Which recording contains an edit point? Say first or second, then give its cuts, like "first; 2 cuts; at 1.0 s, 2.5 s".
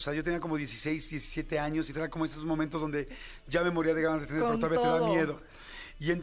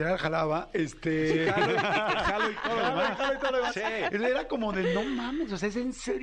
first; 1 cut; at 1.9 s